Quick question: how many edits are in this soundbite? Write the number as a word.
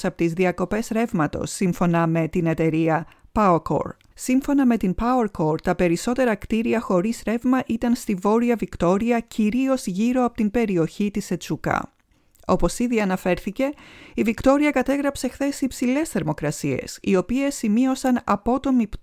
one